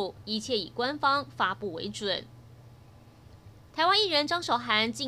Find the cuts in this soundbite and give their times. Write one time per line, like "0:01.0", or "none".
none

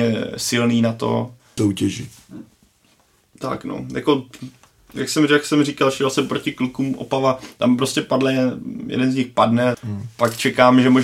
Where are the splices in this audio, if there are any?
0:01.6
0:09.7

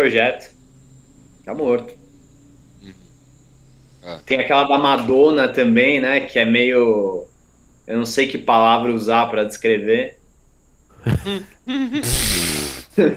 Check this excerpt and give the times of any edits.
none

